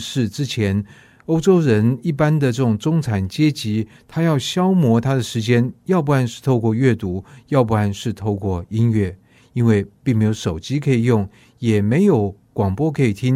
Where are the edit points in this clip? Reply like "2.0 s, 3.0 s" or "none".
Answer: none